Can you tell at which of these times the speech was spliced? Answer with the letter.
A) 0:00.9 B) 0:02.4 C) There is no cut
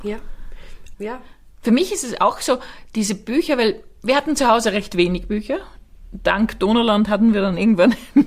A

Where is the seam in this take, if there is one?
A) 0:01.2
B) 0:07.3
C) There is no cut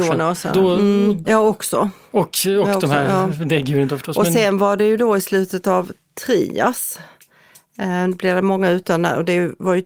A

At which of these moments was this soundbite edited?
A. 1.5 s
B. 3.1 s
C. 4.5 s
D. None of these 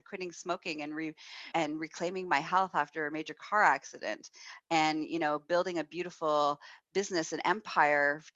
A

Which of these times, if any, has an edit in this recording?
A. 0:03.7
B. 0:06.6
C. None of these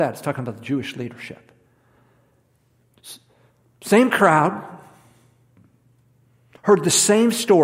B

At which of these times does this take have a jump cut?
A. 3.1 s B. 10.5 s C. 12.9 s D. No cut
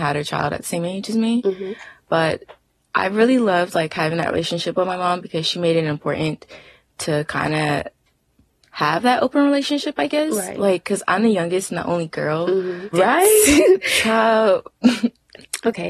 C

